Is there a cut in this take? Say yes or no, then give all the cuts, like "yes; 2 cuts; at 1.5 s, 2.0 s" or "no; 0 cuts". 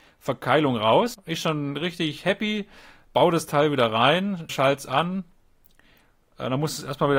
yes; 2 cuts; at 1.1 s, 4.5 s